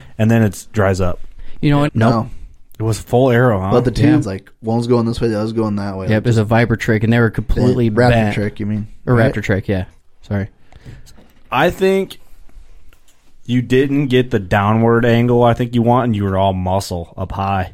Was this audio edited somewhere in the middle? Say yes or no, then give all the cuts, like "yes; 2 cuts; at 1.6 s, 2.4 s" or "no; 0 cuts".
yes; 2 cuts; at 1.9 s, 4.2 s